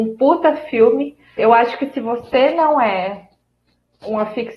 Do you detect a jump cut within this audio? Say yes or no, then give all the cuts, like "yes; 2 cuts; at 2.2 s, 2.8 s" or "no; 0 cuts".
yes; 1 cut; at 1.4 s